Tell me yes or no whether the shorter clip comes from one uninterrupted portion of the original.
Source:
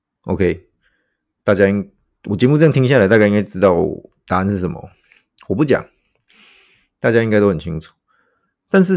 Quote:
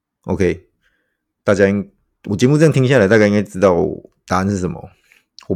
yes